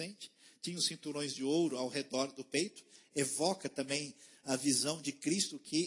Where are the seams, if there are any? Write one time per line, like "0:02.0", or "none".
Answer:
none